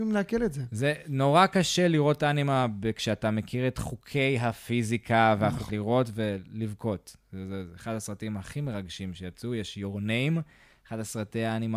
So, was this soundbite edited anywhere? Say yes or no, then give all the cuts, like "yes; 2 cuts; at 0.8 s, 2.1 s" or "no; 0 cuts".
yes; 1 cut; at 5.7 s